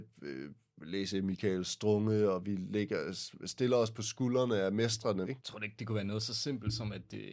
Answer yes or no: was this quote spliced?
yes